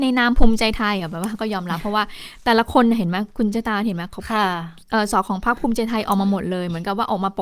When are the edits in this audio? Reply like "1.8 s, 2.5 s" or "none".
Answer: 5.1 s

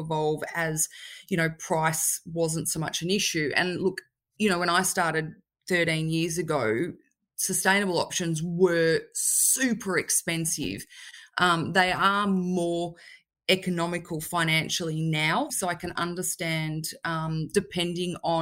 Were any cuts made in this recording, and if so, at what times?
15.5 s

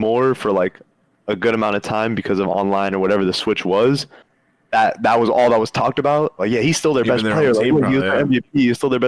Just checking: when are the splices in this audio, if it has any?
6.4 s

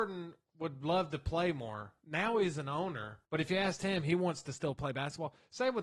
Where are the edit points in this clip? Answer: 3.2 s

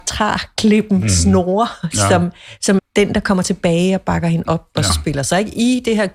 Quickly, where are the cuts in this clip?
2.8 s, 4.9 s

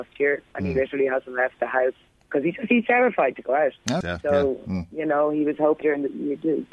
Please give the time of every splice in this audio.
4.0 s, 5.8 s

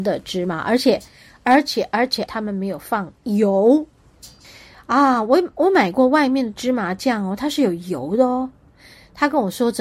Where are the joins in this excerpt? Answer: 2.3 s

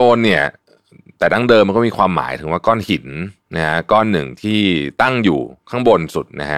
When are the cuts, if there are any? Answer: none

